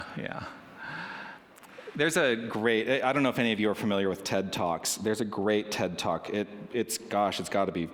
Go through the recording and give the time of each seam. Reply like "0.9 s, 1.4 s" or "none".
none